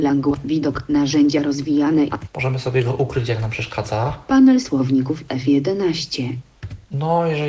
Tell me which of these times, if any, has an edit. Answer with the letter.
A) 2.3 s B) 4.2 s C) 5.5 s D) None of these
A